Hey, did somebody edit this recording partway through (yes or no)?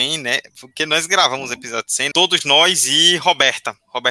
yes